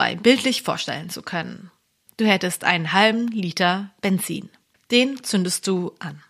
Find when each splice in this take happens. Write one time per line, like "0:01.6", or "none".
0:02.1